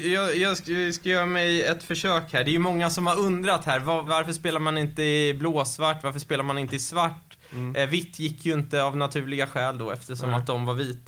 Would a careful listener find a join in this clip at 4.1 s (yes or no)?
yes